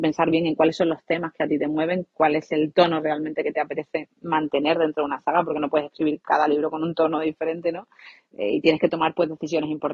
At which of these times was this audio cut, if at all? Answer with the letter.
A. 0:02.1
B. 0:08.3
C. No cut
C